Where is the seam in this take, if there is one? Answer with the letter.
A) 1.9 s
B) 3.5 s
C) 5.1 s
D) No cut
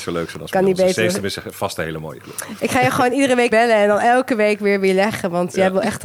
B